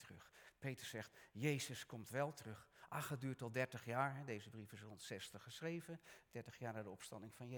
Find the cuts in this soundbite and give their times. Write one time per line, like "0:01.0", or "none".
none